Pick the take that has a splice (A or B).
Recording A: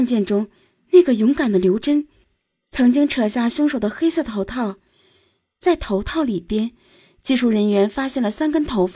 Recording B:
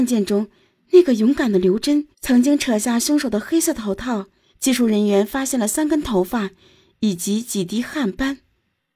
B